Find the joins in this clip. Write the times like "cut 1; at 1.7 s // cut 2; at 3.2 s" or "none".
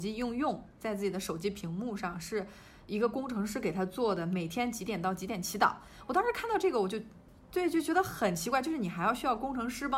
none